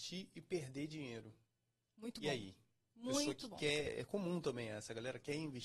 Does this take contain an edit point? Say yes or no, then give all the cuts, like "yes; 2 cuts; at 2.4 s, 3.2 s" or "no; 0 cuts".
no; 0 cuts